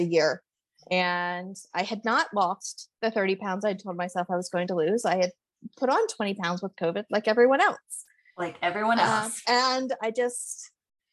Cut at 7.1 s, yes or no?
no